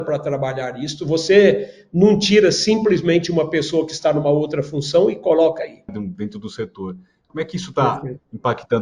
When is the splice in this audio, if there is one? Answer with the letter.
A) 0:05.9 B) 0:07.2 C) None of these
A